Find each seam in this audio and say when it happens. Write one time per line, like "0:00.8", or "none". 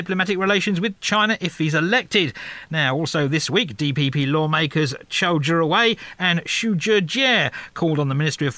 none